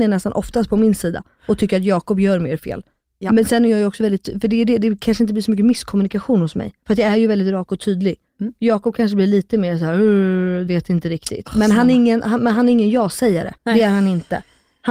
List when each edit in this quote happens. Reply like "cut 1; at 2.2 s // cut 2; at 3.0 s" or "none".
cut 1; at 10.7 s // cut 2; at 13.6 s